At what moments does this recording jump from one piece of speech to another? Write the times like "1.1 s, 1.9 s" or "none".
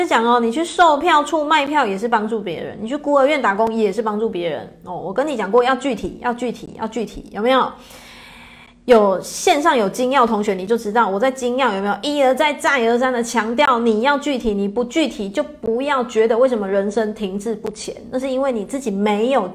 none